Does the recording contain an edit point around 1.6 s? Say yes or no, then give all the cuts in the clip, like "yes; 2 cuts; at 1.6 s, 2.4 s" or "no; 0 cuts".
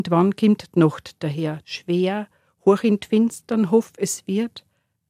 yes; 1 cut; at 1.6 s